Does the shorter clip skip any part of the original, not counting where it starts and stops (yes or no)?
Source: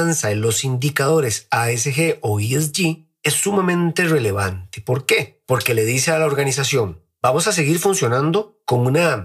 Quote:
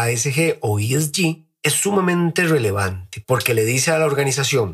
yes